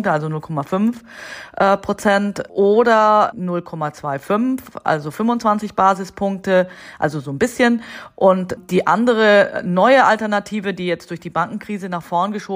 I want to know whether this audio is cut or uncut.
uncut